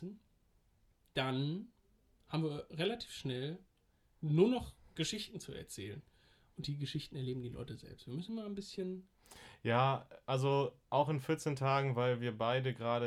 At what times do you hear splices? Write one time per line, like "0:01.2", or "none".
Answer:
none